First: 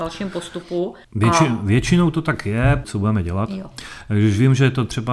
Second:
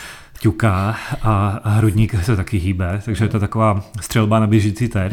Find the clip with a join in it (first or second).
first